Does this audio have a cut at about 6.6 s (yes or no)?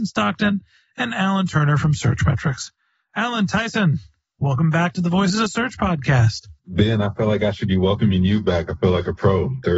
yes